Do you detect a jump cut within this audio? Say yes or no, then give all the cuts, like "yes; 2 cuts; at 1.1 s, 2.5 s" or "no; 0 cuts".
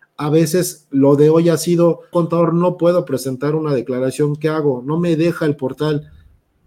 yes; 1 cut; at 2.1 s